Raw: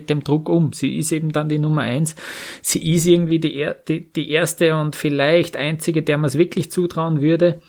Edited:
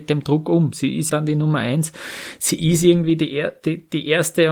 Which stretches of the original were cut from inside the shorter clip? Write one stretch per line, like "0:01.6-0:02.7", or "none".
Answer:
0:01.1-0:01.3